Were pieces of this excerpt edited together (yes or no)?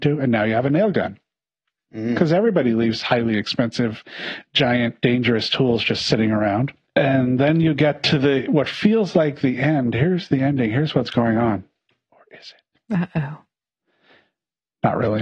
no